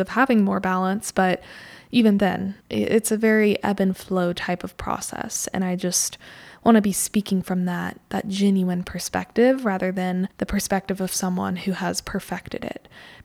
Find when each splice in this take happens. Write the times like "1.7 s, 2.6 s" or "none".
2.6 s, 10.3 s